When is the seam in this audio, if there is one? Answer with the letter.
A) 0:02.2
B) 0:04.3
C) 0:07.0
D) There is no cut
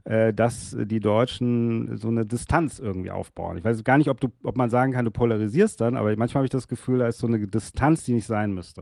D